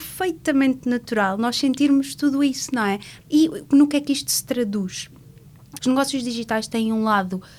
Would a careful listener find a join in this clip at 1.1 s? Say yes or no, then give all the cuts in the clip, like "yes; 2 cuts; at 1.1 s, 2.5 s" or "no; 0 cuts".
no; 2 cuts; at 3.2 s, 5.8 s